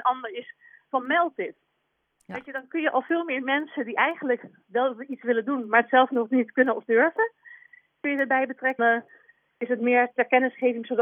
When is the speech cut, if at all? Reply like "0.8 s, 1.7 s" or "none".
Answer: 8.8 s